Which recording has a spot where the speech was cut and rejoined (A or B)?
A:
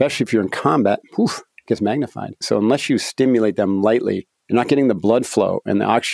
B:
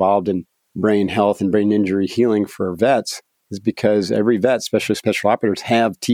A